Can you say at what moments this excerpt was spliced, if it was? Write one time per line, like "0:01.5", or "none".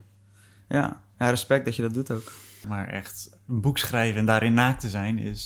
0:02.6

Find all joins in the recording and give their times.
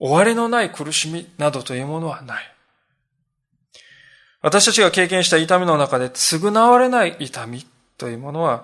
none

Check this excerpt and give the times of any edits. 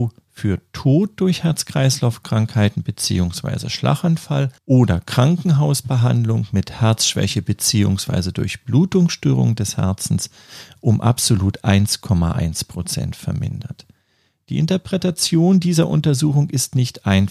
0:04.6

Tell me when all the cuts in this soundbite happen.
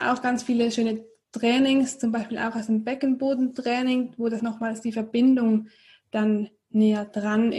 0:04.4

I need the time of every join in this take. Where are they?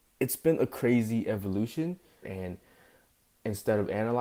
0:02.2

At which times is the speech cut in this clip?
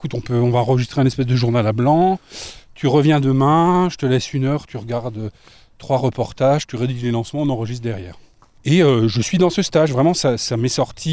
0:08.6

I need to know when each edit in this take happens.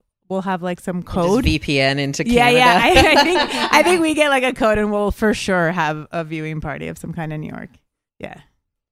none

